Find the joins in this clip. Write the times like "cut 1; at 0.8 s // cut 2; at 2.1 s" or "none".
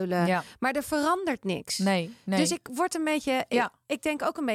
none